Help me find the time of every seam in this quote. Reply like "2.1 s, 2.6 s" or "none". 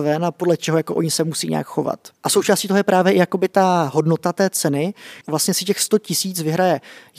2.1 s, 5.2 s